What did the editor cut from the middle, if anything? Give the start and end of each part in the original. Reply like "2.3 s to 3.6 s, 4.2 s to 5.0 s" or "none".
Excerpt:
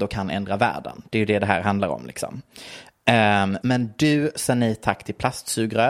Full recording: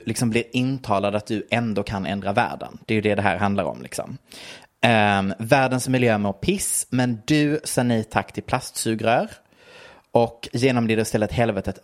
5.4 s to 6.9 s